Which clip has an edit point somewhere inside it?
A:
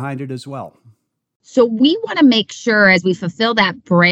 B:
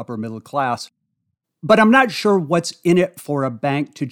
A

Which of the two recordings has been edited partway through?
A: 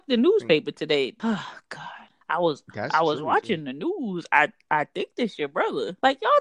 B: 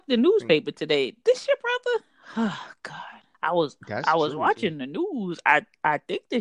A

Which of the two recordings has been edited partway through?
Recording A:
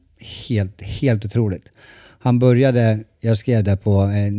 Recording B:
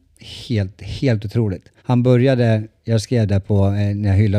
B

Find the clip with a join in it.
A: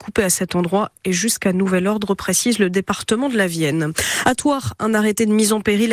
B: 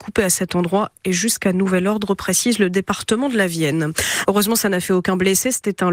B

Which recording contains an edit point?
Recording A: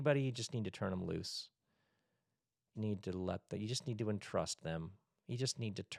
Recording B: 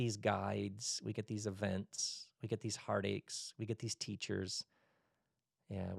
A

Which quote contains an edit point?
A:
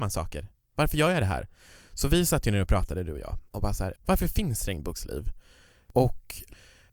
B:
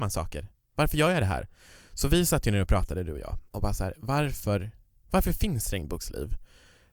A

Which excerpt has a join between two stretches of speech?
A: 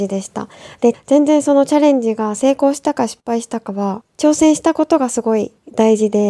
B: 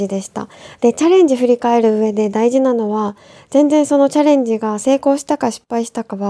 A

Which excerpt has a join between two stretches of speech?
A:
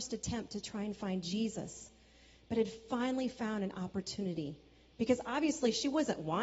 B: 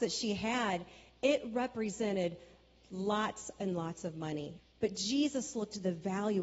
B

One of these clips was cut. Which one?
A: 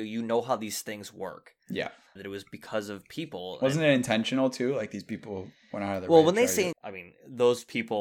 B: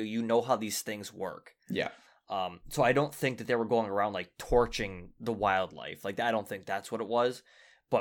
A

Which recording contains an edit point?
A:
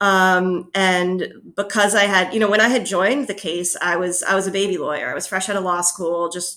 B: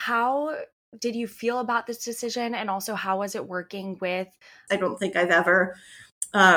B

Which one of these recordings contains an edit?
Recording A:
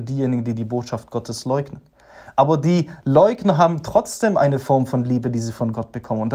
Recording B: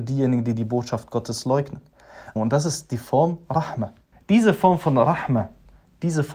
B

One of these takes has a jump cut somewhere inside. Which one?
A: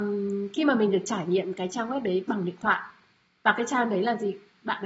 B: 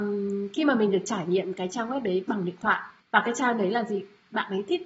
B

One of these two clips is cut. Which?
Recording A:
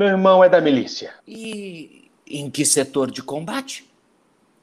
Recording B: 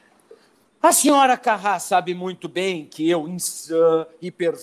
A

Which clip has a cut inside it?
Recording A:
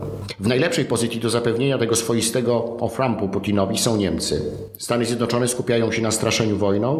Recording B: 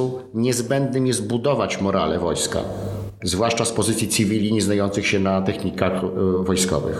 B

